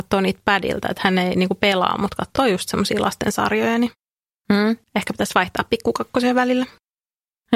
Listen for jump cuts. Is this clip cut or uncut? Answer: uncut